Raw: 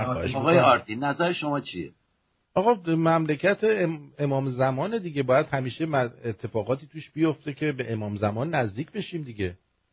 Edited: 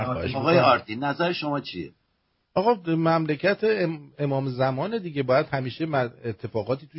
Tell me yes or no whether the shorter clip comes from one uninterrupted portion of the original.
yes